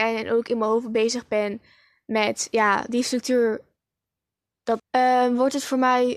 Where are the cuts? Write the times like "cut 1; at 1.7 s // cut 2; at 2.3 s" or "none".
cut 1; at 4.8 s